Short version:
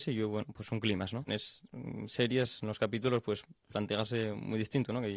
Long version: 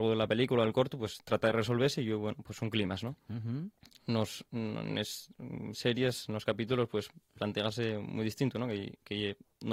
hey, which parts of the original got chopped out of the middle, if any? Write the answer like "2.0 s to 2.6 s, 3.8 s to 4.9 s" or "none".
3.2 s to 4.9 s